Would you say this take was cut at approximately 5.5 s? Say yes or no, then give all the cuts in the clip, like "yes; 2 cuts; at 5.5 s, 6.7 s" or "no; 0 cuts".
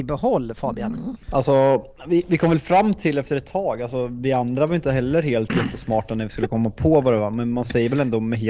no; 1 cut; at 1.2 s